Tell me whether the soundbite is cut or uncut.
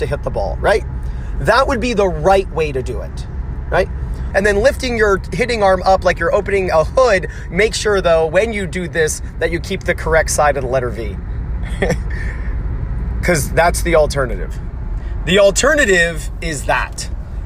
cut